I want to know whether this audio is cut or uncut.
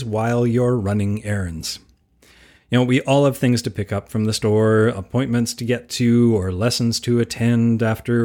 uncut